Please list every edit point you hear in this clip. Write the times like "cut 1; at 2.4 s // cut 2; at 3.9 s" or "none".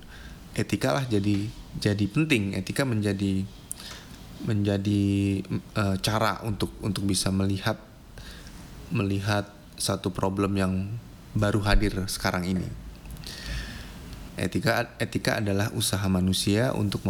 cut 1; at 14.3 s